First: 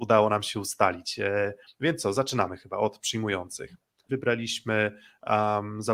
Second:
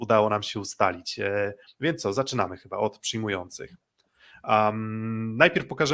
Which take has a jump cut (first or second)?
first